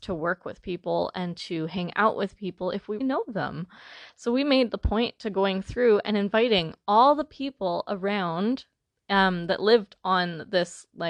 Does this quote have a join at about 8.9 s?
no; 1 cut; at 3.0 s

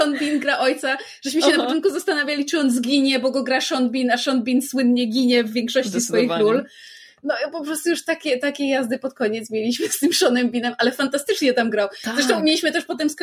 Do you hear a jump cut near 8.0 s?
no; 0 cuts

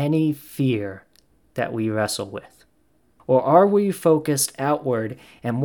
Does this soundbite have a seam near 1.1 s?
no; 1 cut; at 3.2 s

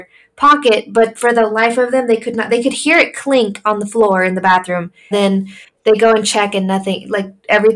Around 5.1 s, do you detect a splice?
yes; 1 cut; at 5.1 s

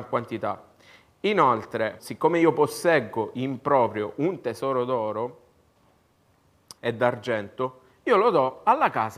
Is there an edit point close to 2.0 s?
yes; 2 cuts; at 2.0 s, 6.8 s

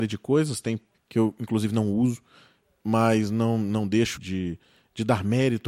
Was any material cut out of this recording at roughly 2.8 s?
no; 2 cuts; at 0.9 s, 4.2 s

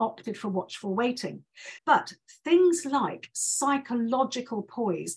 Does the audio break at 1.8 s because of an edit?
yes; 1 cut; at 1.8 s

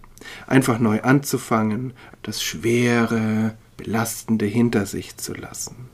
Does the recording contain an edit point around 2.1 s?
yes; 2 cuts; at 2.1 s, 3.7 s

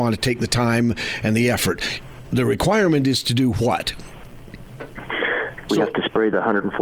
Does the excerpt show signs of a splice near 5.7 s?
yes; 1 cut; at 5.7 s

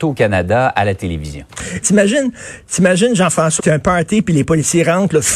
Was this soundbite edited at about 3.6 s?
yes; 2 cuts; at 1.8 s, 3.6 s

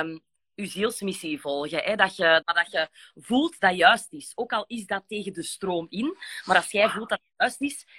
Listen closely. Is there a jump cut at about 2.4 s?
yes; 1 cut; at 2.4 s

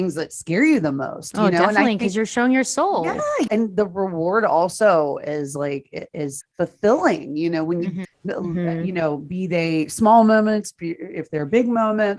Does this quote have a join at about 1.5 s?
no; 3 cuts; at 3.5 s, 6.4 s, 8.0 s

